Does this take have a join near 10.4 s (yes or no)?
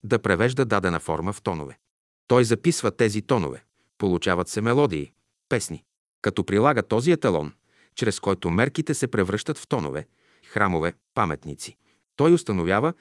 yes